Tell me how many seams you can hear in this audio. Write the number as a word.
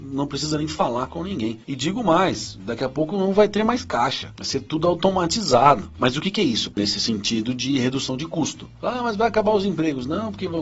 one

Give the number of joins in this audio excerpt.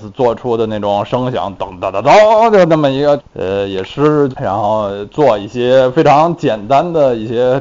two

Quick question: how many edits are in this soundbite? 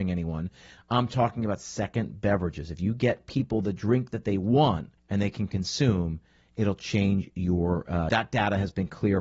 two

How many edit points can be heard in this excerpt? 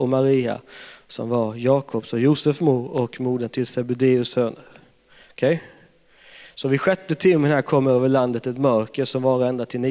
zero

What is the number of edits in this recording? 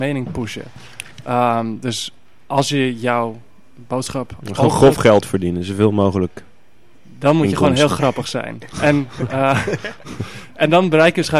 zero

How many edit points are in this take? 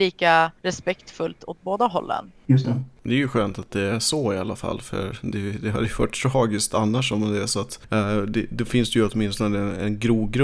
zero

